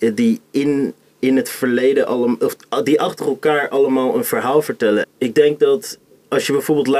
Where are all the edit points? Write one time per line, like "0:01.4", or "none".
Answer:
0:05.0